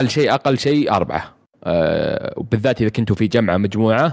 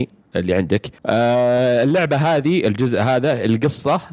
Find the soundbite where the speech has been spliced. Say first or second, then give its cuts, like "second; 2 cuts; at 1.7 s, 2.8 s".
second; 1 cut; at 1.0 s